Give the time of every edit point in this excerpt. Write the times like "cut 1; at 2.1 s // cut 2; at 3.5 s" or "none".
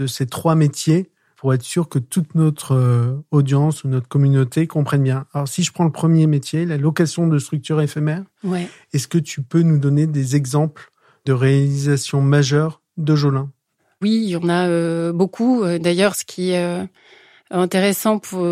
none